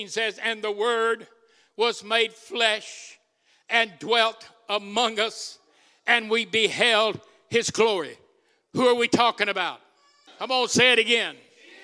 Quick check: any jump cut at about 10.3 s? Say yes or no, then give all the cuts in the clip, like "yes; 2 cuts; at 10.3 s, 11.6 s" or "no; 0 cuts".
yes; 1 cut; at 10.3 s